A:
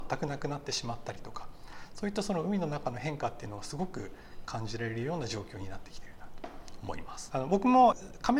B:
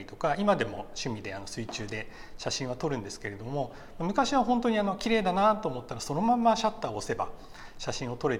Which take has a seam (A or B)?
A